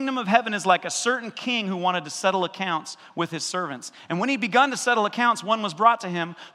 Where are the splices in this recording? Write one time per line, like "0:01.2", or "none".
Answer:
none